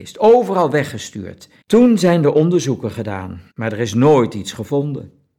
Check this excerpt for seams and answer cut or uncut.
cut